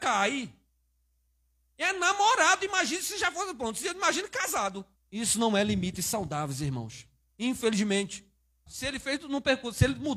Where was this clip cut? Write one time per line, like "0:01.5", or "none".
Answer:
0:05.0
0:08.7